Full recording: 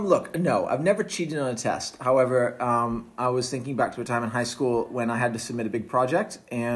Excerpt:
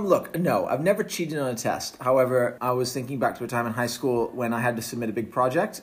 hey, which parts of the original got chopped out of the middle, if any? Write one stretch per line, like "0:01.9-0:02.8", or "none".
0:02.6-0:03.1